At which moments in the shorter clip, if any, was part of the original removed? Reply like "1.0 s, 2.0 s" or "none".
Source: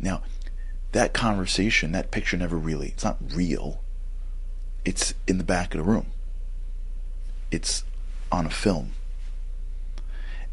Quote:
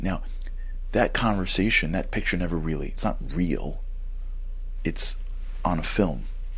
4.8 s